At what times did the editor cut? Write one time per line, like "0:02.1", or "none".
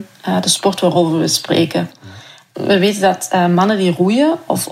none